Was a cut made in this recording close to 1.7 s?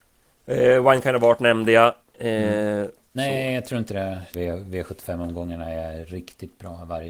no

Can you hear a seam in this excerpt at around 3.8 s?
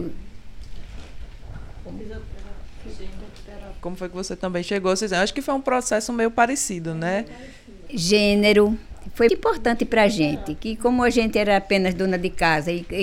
yes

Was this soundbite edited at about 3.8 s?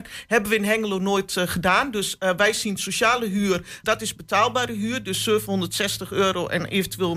yes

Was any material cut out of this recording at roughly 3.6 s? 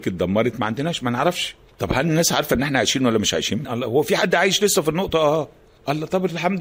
yes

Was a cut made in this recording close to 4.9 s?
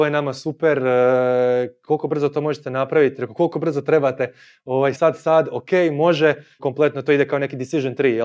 yes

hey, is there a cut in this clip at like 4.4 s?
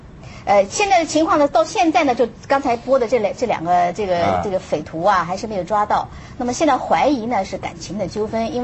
no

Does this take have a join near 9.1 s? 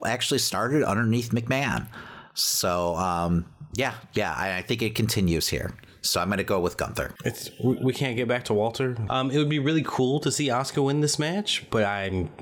yes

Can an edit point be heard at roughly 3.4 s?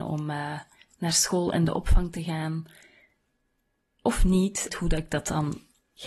no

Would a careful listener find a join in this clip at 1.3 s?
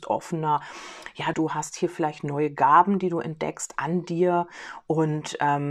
yes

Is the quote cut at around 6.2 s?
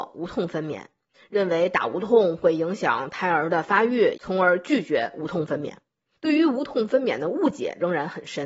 no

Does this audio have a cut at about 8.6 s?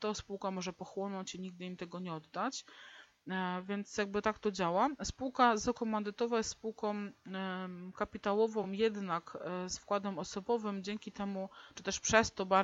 no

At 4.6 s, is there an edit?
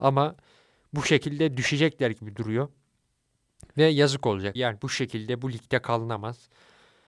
yes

